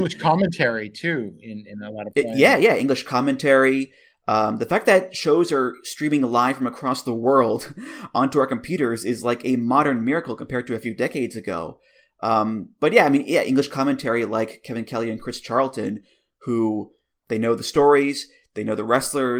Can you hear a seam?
no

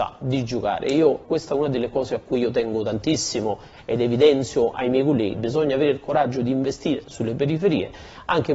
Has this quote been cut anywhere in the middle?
yes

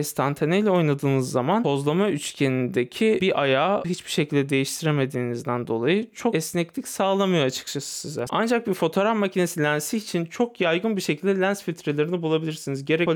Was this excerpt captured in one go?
no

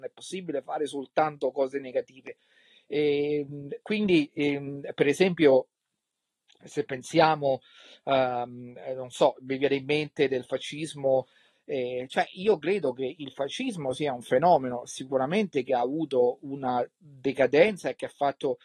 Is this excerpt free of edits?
no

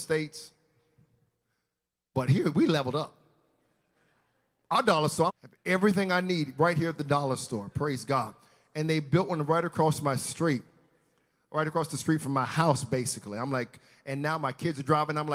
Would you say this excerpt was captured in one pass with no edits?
no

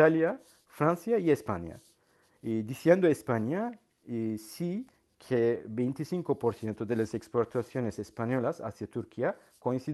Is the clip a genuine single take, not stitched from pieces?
yes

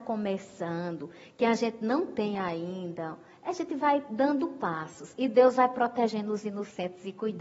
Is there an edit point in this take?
no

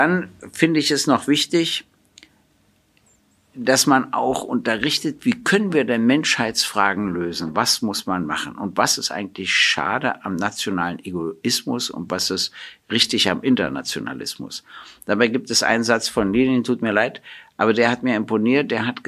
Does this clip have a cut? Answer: no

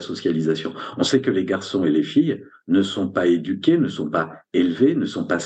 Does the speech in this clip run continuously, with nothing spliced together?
yes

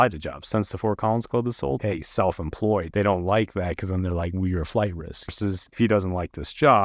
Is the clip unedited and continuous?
no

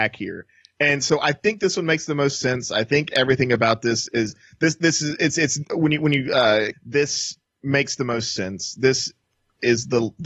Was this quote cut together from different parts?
yes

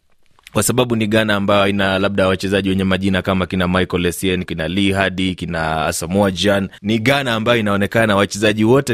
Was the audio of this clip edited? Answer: yes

